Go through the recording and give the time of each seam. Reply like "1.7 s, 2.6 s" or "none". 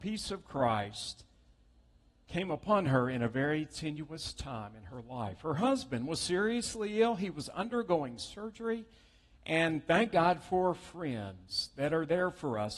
none